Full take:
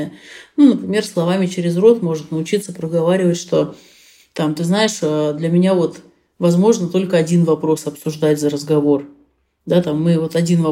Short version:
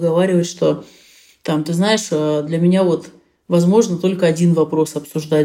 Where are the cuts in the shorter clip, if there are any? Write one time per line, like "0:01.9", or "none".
none